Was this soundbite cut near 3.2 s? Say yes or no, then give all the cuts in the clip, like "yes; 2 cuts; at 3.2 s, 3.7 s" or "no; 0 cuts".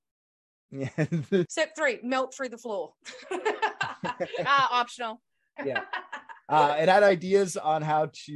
no; 1 cut; at 5.6 s